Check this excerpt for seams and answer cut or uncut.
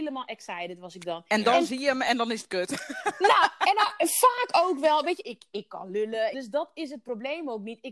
cut